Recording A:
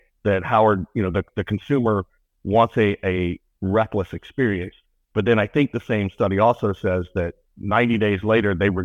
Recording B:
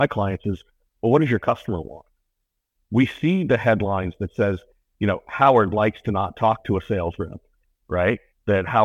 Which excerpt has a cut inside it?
A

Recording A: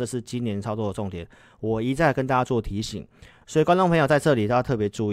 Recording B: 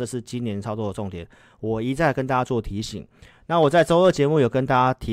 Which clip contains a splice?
A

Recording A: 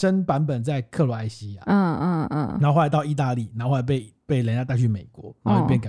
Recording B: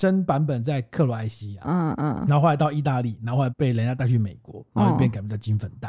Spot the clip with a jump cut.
B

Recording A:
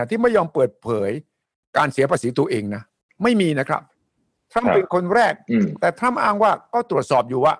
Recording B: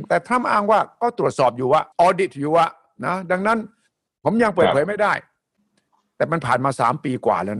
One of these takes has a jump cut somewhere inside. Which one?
B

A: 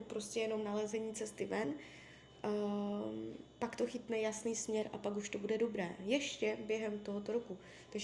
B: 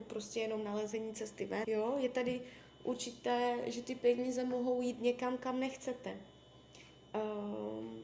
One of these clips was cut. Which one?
B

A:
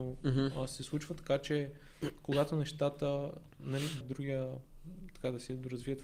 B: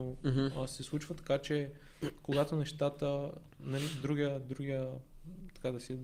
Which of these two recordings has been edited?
A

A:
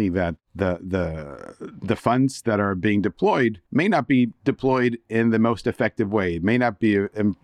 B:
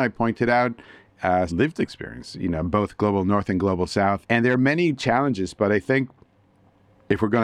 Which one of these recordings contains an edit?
B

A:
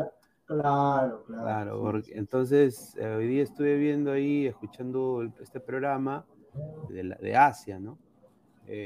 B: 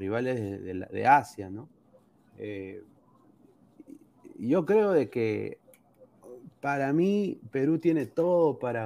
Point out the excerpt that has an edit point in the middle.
A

